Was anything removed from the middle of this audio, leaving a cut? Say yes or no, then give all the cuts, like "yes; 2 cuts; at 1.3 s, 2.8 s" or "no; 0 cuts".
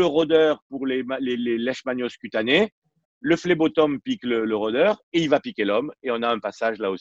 yes; 1 cut; at 1.4 s